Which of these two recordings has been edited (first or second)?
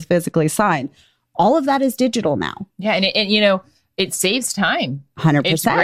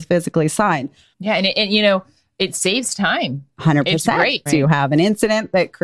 second